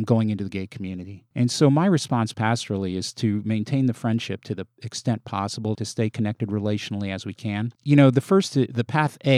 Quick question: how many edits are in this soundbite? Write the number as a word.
two